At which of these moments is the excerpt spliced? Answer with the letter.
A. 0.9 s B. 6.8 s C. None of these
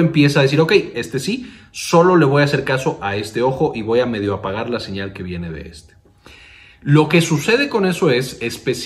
A